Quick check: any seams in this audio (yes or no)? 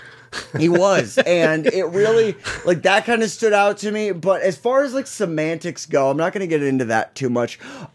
no